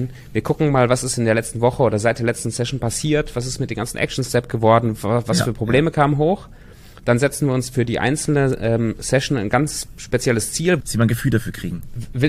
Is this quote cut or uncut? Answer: cut